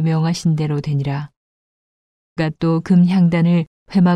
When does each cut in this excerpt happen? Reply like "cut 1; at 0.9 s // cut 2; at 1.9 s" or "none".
cut 1; at 2.4 s